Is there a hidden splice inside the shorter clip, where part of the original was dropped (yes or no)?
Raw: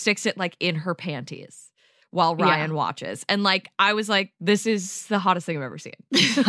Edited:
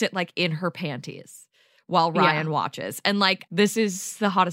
yes